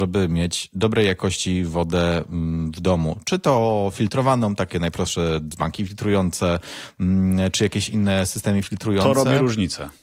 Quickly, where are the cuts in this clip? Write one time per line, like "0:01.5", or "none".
none